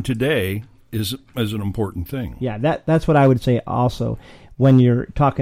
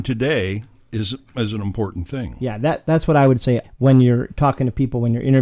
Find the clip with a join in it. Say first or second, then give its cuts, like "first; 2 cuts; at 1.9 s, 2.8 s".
second; 1 cut; at 3.6 s